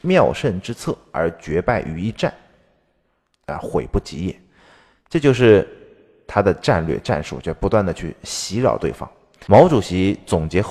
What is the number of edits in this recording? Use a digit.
0